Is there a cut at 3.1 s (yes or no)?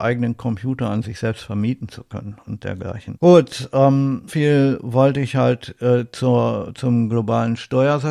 yes